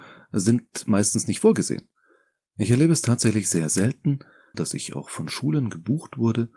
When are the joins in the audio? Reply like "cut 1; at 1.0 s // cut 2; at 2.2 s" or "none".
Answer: cut 1; at 4.5 s